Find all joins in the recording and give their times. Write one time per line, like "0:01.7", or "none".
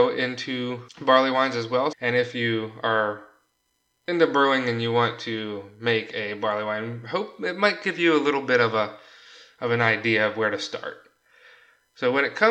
0:01.9